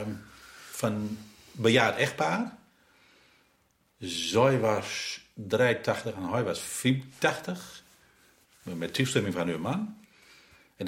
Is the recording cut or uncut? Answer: cut